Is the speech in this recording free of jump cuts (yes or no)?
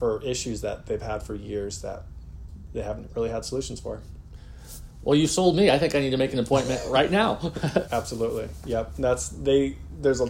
no